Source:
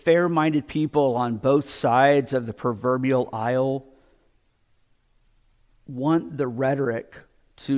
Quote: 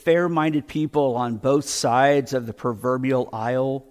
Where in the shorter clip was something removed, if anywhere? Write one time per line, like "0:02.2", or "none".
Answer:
none